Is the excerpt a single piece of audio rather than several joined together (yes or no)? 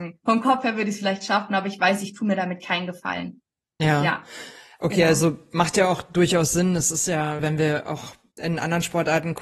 no